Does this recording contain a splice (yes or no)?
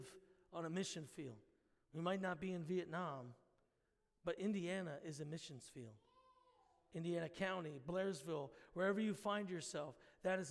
no